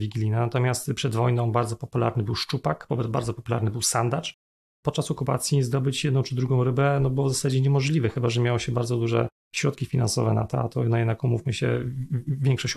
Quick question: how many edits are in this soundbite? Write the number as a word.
zero